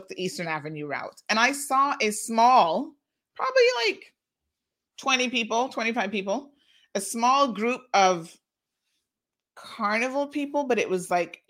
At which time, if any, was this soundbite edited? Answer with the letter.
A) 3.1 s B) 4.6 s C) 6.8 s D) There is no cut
D